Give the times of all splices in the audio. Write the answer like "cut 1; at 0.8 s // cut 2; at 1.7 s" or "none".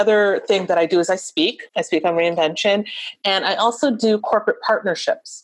cut 1; at 1.7 s